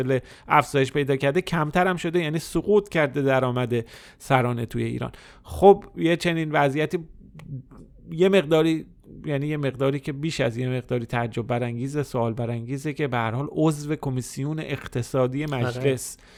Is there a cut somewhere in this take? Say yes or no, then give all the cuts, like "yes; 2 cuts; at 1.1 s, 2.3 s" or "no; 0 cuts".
no; 0 cuts